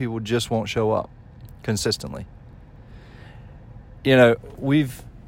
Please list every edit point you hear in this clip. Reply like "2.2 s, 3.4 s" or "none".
none